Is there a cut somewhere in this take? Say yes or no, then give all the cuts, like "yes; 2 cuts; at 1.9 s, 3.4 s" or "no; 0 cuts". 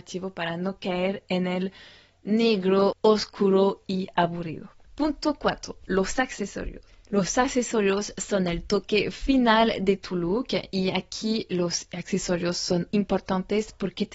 yes; 1 cut; at 12.9 s